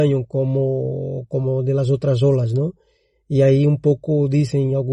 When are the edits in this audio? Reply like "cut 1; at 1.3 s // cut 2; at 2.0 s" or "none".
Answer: none